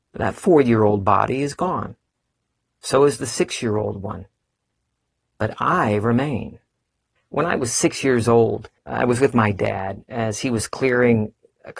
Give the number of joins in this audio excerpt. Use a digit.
2